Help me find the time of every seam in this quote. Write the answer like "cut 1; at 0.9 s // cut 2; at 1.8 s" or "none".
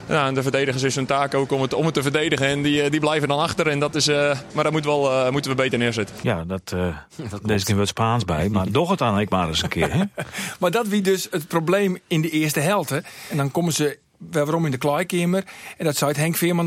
cut 1; at 4.5 s

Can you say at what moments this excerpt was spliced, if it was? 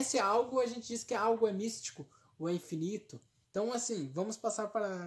cut 1; at 3.4 s

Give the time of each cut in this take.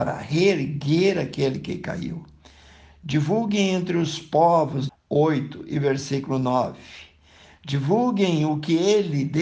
cut 1; at 4.9 s

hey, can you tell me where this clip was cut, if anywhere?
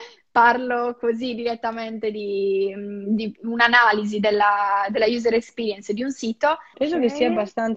cut 1; at 6.7 s

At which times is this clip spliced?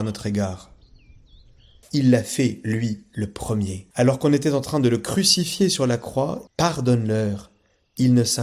cut 1; at 1.8 s // cut 2; at 3.9 s // cut 3; at 6.5 s

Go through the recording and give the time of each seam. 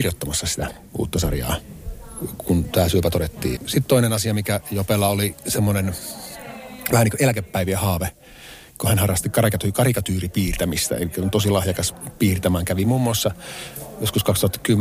cut 1; at 3.6 s

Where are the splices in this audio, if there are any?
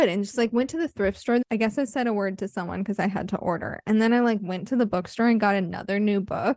cut 1; at 1.4 s

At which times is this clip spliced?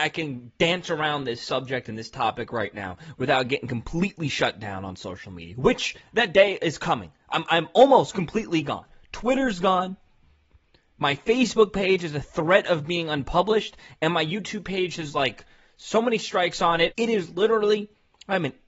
cut 1; at 16.9 s

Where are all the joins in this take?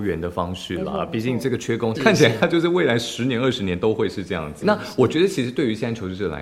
cut 1; at 1.9 s // cut 2; at 4.6 s

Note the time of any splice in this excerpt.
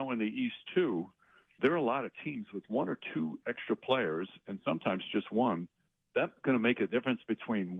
cut 1; at 1.6 s

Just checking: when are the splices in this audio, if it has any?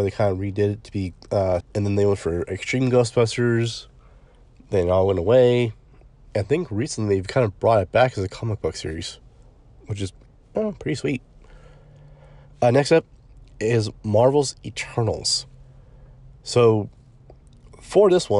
cut 1; at 1.6 s

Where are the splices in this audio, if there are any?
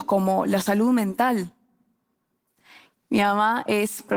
cut 1; at 2.9 s

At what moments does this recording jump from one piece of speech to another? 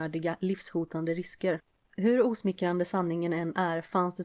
none

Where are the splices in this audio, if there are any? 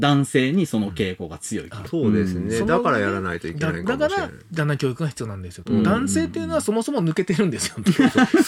cut 1; at 1.9 s

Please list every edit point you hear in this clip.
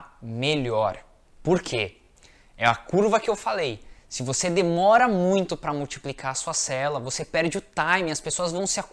none

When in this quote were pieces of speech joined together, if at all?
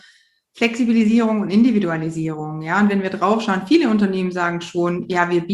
none

